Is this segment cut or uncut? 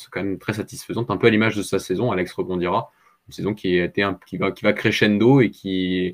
uncut